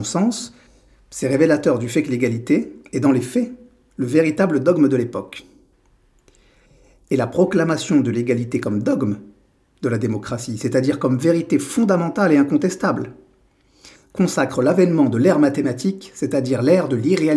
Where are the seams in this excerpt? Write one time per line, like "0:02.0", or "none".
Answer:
none